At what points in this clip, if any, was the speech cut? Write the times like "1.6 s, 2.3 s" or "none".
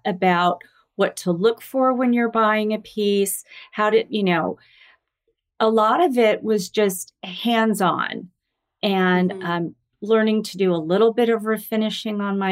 none